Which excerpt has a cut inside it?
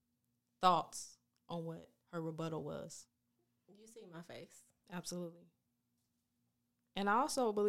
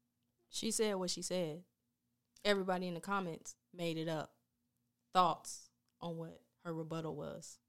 first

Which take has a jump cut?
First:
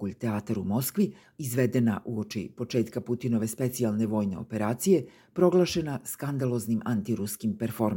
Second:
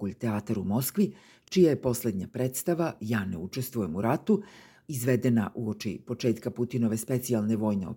first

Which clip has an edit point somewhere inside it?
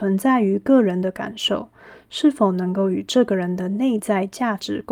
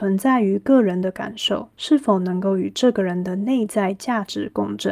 second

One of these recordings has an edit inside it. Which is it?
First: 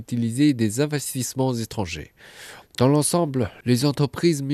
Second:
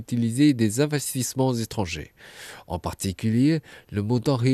first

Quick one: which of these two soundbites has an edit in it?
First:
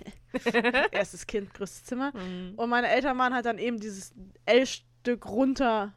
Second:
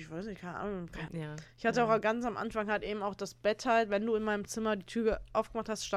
second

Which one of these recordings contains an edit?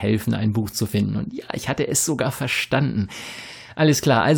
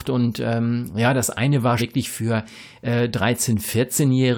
second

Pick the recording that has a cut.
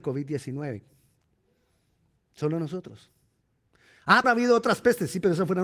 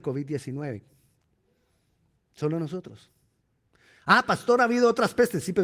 first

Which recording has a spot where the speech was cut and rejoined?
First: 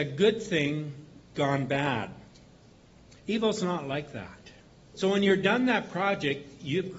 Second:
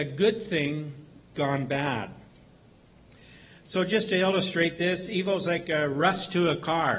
first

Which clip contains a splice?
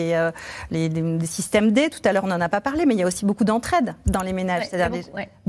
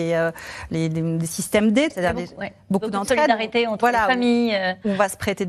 second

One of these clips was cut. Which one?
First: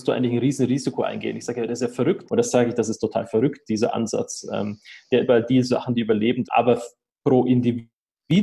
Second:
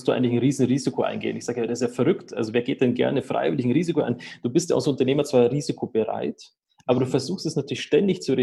first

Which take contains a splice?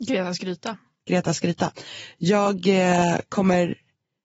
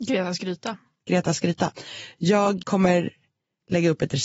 second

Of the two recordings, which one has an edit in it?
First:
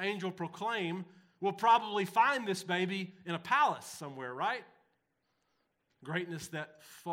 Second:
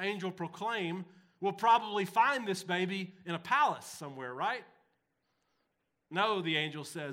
first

